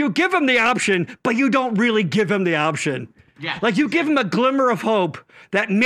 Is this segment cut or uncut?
uncut